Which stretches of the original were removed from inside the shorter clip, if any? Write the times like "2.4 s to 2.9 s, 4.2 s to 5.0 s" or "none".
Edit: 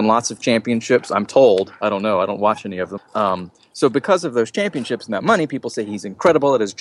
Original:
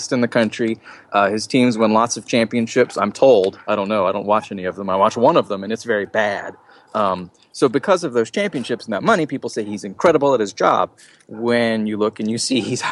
4.8 s to 6.8 s